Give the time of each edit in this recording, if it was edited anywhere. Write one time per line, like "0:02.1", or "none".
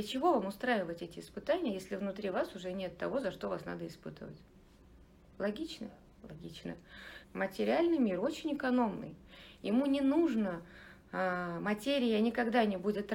0:07.2